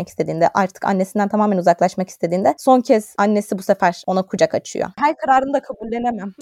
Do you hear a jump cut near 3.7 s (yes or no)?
no